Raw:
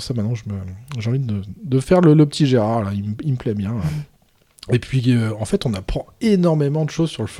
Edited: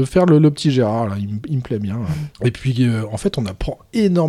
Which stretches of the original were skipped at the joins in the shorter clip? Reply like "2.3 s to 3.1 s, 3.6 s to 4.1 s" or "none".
4.1 s to 4.6 s

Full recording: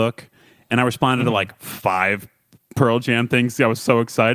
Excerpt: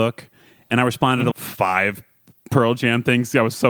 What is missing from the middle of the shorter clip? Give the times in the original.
1.3 s to 1.6 s

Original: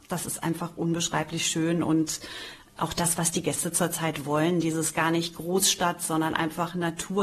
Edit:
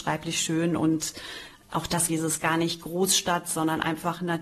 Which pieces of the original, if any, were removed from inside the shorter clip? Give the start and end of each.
3.2 s to 4.6 s

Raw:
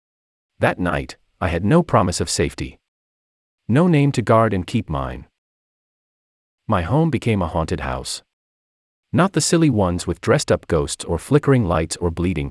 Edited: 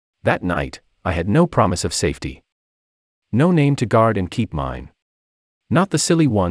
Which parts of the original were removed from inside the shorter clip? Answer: 5.8 s to 8.9 s

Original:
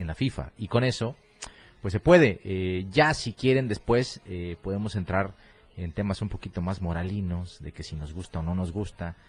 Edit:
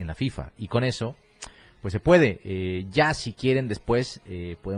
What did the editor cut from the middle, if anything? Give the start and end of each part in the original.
none

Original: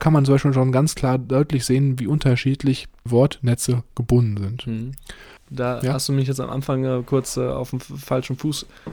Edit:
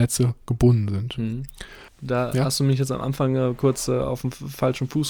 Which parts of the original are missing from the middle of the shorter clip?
none

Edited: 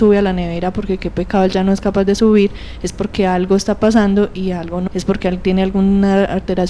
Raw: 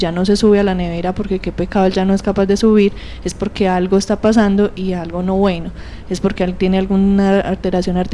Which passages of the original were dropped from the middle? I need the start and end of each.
5.3 s to 6.0 s

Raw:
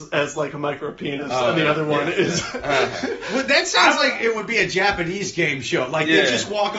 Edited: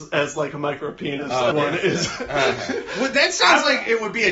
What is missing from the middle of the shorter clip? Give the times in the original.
1.5 s to 1.9 s

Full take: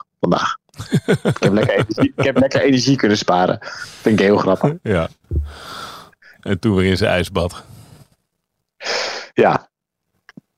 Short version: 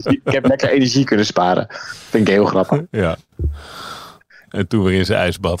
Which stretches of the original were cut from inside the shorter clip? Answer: none

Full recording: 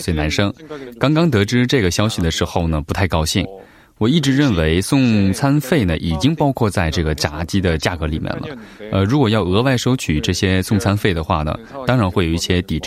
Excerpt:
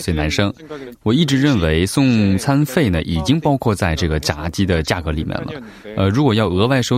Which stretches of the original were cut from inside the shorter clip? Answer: 0.9 s to 3.9 s

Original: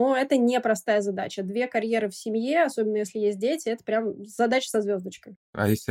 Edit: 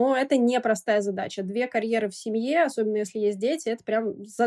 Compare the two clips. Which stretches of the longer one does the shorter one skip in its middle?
none

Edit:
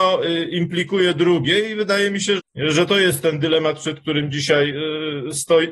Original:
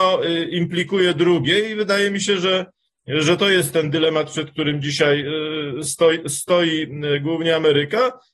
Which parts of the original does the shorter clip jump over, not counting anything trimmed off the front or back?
2.4 s to 2.9 s

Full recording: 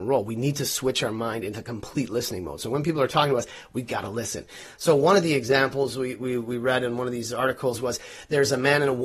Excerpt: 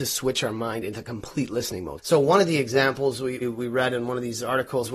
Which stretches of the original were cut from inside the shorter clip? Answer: 2.6 s to 4.7 s, 6.2 s to 6.3 s

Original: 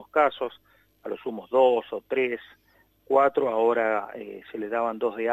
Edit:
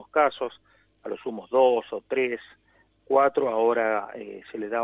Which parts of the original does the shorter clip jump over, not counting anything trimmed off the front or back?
none

